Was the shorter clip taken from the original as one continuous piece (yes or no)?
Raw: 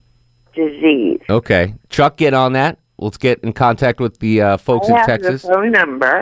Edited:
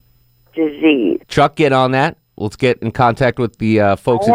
no